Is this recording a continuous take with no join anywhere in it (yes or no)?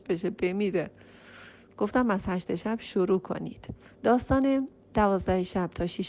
no